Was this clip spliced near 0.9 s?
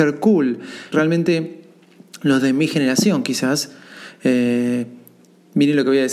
yes; 1 cut; at 0.9 s

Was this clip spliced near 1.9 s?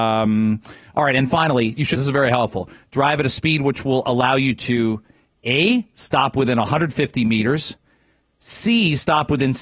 yes; 1 cut; at 1.9 s

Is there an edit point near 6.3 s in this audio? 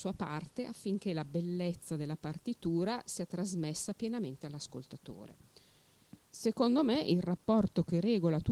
yes; 1 cut; at 6.3 s

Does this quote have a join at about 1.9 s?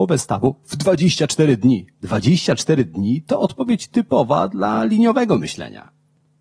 yes; 1 cut; at 1.9 s

